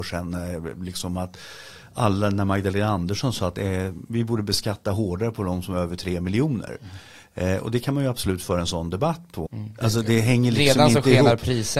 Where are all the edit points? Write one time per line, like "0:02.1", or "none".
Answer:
0:09.5